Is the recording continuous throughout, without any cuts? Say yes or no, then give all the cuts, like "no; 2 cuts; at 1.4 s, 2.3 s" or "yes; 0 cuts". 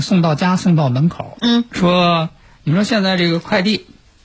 no; 1 cut; at 1.4 s